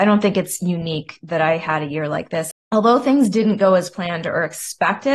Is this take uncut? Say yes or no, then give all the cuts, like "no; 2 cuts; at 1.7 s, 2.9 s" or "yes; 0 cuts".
no; 1 cut; at 2.5 s